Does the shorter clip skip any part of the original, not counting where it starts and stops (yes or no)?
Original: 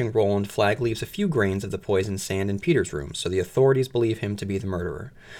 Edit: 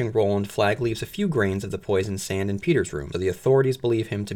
yes